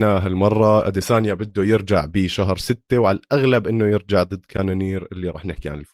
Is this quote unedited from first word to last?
yes; 0 cuts

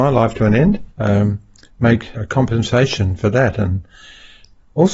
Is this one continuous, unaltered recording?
no; 2 cuts; at 0.9 s, 2.2 s

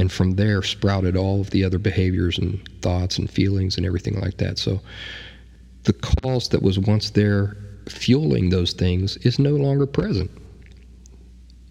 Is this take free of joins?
yes; 0 cuts

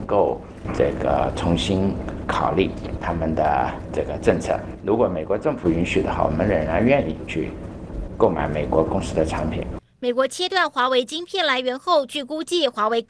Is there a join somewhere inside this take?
no; 0 cuts

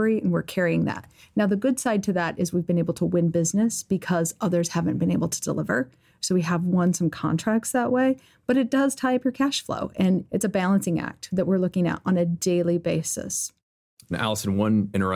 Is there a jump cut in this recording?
no; 0 cuts

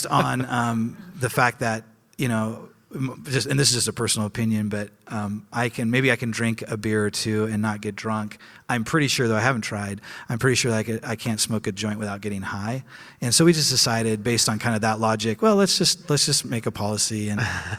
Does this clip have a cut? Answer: no; 0 cuts

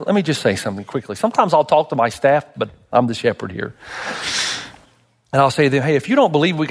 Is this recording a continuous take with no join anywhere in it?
no; 1 cut; at 2.5 s

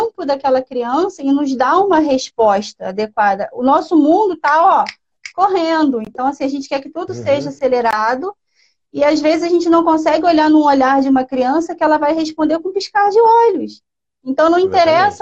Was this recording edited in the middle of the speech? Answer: no; 0 cuts

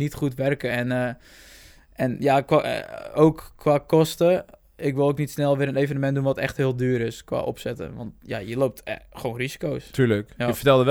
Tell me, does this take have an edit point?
no; 0 cuts

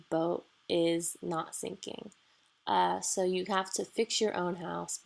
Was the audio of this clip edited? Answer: no; 0 cuts

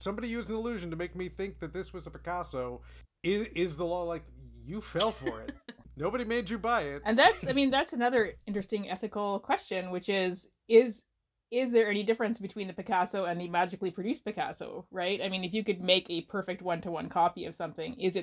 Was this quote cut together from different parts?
no; 0 cuts

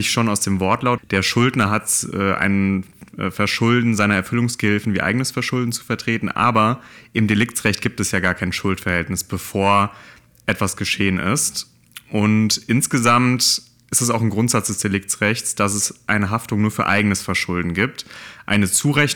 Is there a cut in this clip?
yes; 1 cut; at 1.0 s

